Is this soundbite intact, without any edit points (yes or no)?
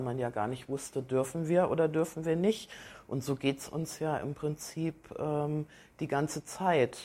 yes